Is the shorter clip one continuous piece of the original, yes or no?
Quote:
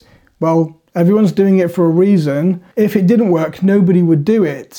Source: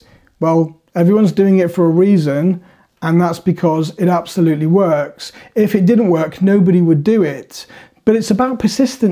no